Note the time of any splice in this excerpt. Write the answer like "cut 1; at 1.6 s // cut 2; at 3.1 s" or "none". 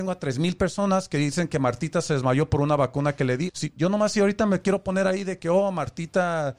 cut 1; at 3.5 s

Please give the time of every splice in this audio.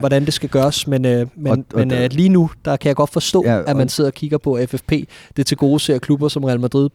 none

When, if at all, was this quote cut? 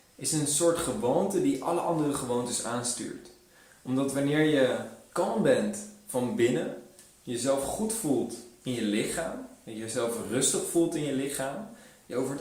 none

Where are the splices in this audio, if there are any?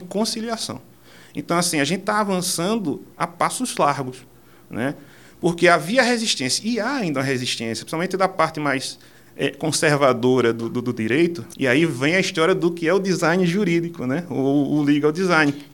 cut 1; at 11.5 s

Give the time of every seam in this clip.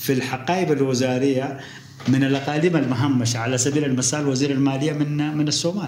none

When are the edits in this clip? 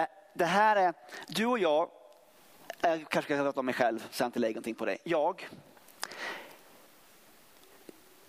none

